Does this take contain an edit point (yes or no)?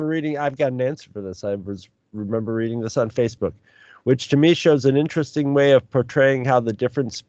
no